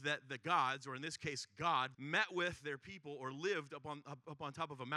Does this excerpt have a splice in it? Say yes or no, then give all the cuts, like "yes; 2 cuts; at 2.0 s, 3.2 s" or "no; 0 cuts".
yes; 1 cut; at 1.9 s